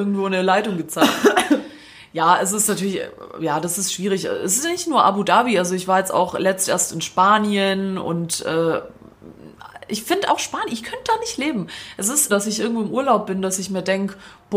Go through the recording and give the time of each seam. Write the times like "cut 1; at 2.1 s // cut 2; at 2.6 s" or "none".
cut 1; at 10.3 s // cut 2; at 12.3 s